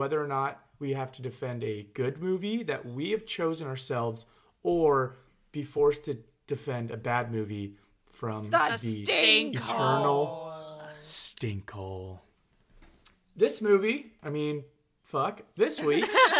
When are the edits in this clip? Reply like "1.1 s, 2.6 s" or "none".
none

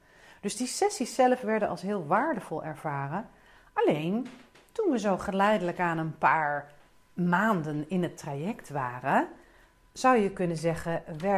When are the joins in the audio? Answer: none

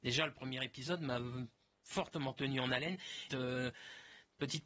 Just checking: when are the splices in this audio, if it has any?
3.3 s

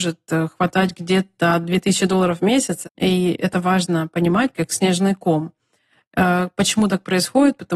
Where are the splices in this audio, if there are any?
2.8 s, 4.5 s

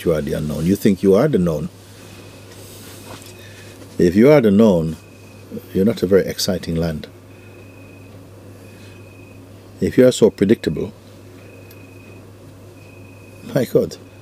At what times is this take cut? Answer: none

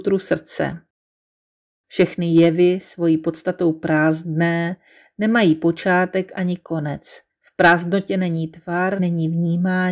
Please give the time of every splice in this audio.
7.3 s, 9.0 s

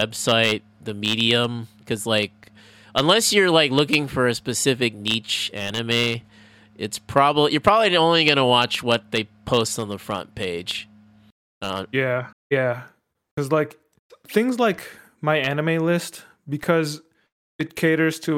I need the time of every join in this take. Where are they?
12.3 s

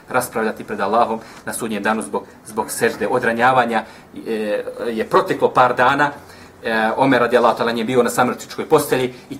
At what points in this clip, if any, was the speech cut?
none

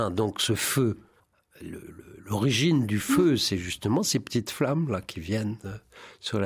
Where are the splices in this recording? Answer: 1.9 s

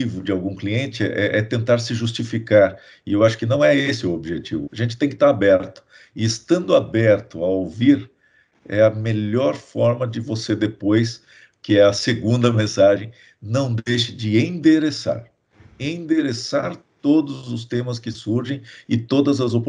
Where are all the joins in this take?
4.7 s

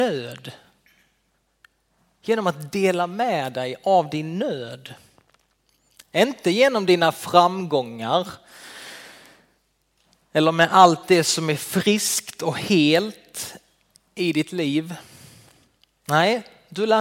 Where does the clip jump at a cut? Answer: none

